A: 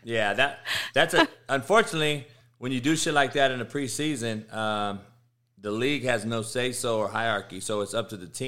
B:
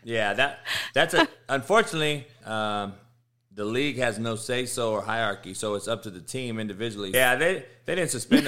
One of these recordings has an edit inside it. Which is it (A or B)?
B